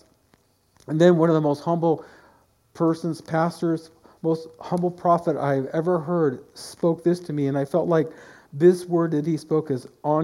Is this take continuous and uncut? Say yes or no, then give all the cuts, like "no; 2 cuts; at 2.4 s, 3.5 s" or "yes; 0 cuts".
yes; 0 cuts